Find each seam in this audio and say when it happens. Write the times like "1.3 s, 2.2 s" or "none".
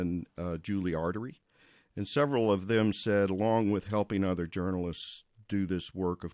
none